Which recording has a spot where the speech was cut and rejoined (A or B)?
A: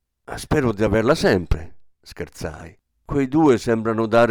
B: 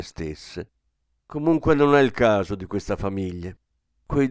A